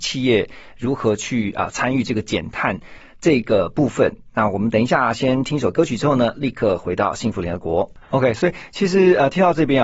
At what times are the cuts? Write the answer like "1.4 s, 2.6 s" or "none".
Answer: 8.0 s